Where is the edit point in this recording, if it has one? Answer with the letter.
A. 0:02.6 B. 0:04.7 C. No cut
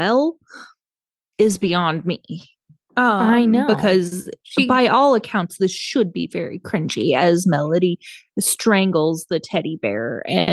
C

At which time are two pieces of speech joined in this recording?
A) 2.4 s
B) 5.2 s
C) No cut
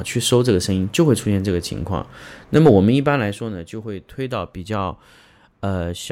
C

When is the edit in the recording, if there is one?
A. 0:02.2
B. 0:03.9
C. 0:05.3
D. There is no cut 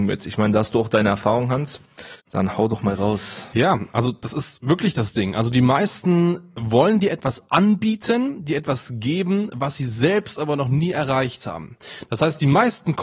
A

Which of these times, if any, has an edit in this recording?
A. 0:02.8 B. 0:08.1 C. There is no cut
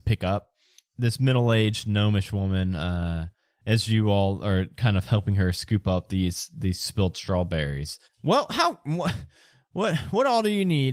B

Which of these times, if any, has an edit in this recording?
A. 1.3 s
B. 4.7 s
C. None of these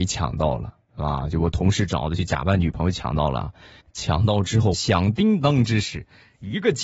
B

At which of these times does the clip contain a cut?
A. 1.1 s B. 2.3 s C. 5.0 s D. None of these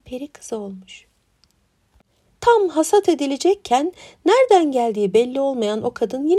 B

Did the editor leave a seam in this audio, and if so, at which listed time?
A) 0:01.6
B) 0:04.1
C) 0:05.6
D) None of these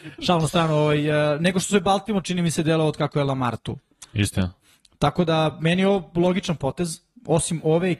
D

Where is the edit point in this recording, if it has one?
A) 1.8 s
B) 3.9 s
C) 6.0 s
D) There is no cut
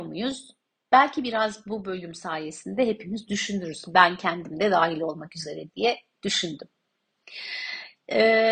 D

